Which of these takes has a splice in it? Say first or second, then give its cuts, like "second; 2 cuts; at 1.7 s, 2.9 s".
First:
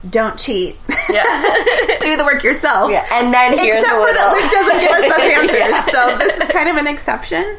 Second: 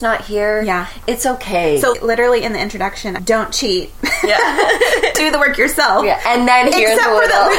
second; 2 cuts; at 1.9 s, 3.2 s